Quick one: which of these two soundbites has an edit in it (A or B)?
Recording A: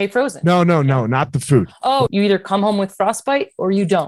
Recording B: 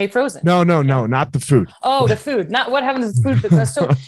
A